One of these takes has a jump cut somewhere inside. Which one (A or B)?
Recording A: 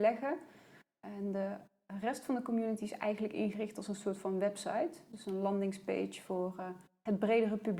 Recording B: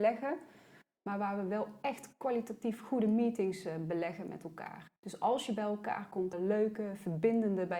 B